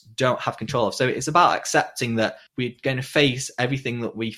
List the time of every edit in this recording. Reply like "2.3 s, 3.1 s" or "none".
2.5 s